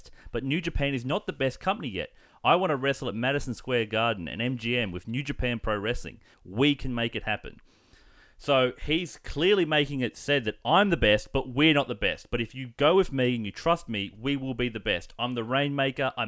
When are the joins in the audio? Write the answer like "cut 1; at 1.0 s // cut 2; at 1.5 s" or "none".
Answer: none